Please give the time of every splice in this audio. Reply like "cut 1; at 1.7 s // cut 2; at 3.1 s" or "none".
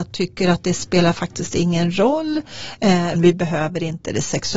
cut 1; at 3.2 s